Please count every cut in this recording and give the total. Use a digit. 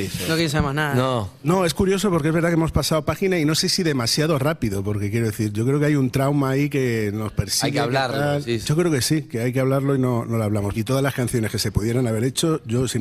1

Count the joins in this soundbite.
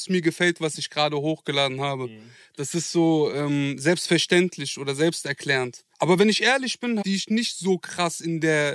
2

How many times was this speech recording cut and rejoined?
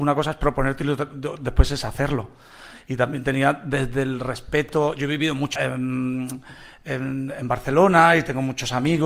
1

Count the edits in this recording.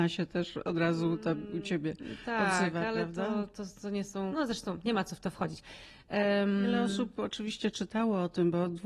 1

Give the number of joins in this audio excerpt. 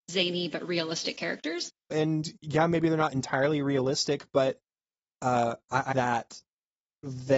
2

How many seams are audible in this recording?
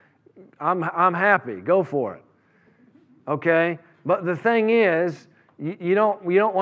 0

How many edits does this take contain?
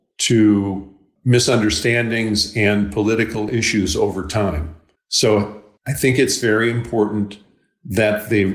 0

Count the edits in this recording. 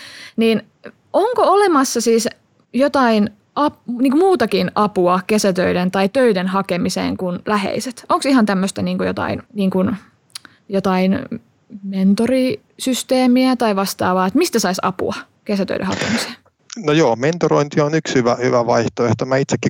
1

